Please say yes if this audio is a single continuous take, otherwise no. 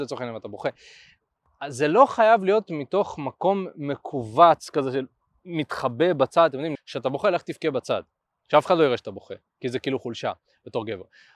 no